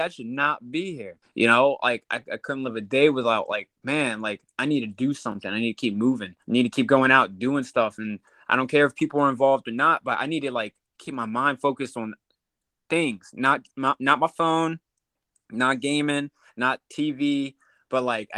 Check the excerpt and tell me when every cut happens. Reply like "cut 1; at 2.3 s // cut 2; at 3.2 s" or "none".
cut 1; at 1.2 s // cut 2; at 6.4 s